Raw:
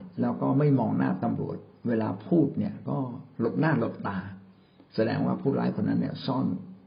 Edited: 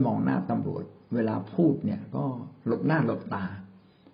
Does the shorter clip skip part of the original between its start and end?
no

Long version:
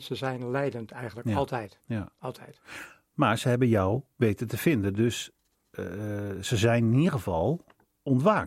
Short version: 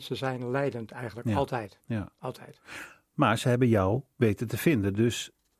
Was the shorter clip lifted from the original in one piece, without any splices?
yes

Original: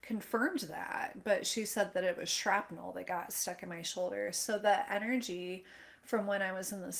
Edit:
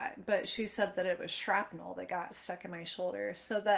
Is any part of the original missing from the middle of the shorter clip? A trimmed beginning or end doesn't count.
no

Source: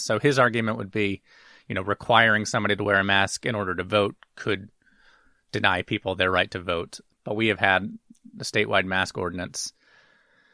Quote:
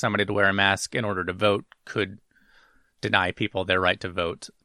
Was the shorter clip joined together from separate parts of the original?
no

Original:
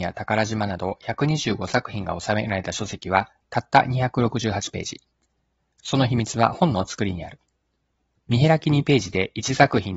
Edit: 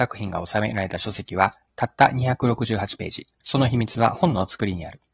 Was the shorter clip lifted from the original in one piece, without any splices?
no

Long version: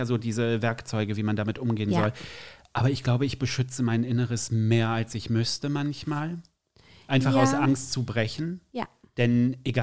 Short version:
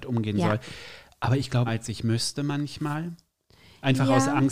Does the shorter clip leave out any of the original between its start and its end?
yes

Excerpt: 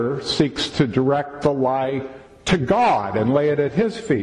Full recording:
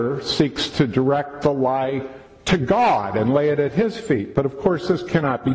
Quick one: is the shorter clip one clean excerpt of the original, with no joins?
yes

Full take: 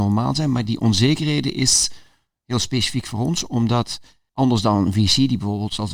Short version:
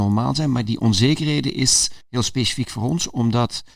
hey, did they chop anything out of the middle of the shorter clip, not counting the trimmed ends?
yes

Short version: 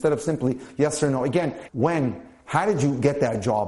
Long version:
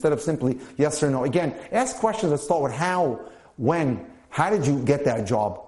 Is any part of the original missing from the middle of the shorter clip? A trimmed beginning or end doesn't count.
yes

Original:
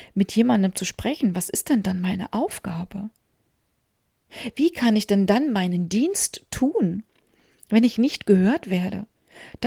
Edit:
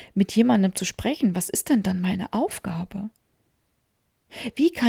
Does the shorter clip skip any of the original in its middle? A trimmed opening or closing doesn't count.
no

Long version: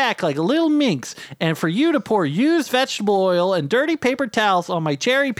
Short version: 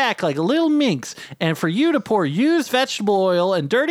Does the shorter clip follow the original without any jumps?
yes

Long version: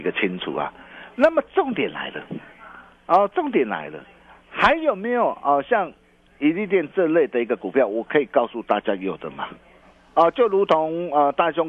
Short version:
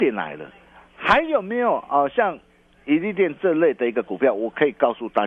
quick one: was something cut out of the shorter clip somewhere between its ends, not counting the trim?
no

